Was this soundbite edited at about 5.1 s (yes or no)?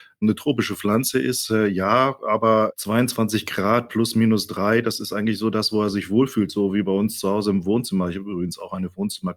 no